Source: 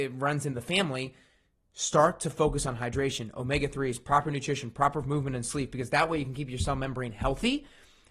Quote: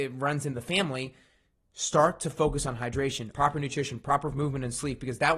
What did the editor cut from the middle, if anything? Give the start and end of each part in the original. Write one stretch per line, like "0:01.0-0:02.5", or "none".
0:03.3-0:04.0